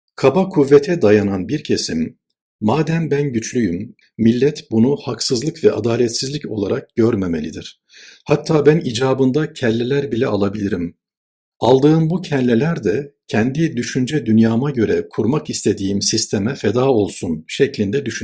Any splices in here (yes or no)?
yes